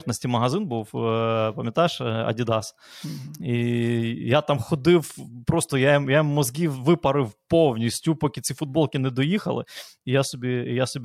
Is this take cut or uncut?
uncut